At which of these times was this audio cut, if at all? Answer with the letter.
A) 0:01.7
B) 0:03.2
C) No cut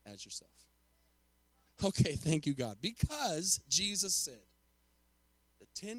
A